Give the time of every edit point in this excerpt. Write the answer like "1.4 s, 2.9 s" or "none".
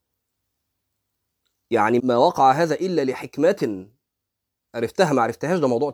2.0 s